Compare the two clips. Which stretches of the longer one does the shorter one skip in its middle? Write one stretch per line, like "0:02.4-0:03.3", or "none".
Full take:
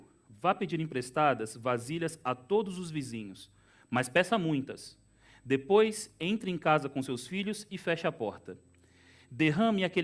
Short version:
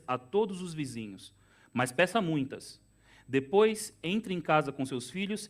none